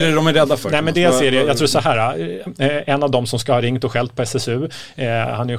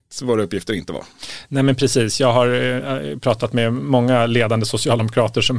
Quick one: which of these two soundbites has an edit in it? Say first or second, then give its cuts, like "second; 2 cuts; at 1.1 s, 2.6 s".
first; 1 cut; at 2.5 s